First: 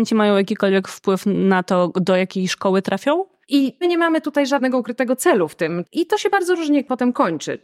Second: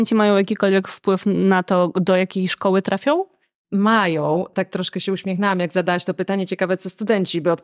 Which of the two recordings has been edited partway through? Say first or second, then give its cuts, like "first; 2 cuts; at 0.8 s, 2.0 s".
first; 2 cuts; at 3.4 s, 5.8 s